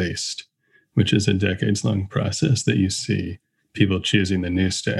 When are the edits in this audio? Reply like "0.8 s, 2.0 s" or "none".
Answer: none